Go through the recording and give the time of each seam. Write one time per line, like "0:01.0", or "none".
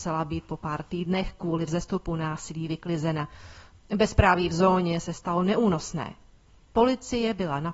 0:03.7
0:06.7